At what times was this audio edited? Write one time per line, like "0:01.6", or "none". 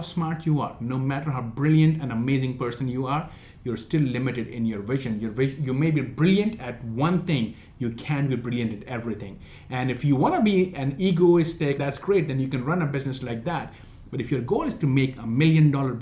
0:11.8

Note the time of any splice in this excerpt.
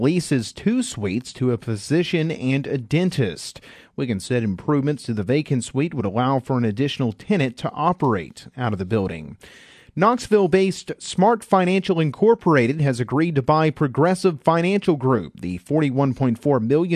none

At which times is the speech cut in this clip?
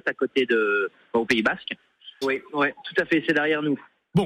0:02.2

